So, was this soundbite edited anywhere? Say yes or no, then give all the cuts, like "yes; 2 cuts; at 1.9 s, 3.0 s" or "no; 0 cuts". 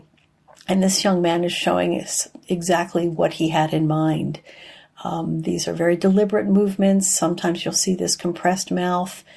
no; 0 cuts